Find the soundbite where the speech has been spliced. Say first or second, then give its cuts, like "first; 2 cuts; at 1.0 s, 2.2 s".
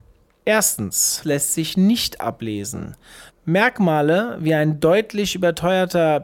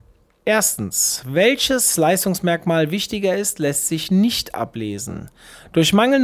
first; 2 cuts; at 1.2 s, 3.3 s